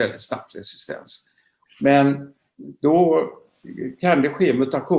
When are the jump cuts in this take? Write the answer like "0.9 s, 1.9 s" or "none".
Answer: 1.7 s